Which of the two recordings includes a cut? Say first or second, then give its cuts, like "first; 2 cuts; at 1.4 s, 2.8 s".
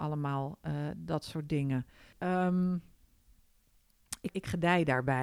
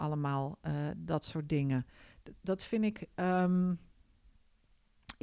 first; 2 cuts; at 2.1 s, 4.3 s